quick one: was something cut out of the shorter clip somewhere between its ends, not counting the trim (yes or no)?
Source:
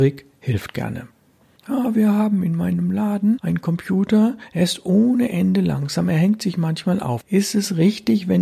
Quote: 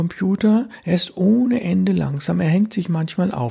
no